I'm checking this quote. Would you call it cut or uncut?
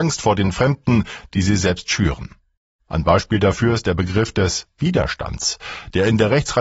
cut